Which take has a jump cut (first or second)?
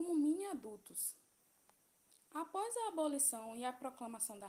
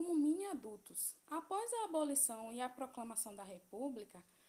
second